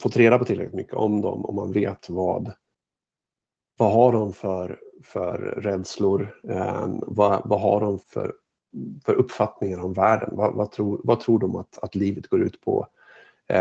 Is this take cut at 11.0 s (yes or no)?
no